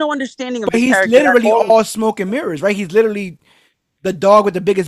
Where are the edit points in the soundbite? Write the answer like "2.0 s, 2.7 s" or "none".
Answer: none